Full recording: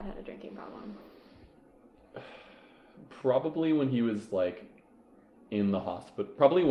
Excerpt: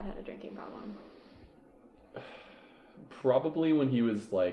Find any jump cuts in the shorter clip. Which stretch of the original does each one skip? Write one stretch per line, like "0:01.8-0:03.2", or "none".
none